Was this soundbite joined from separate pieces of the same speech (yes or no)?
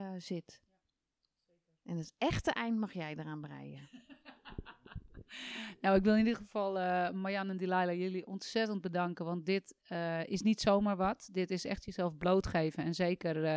no